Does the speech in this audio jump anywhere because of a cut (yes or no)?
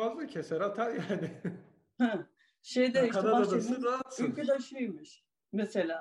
no